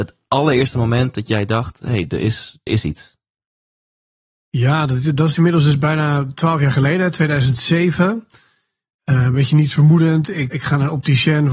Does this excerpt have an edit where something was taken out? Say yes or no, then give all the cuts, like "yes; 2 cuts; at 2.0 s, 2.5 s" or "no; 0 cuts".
yes; 2 cuts; at 2.7 s, 10.5 s